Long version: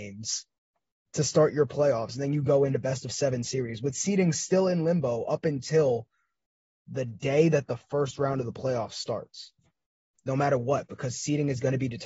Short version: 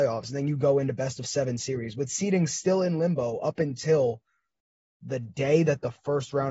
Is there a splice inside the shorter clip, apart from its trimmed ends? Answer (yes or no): no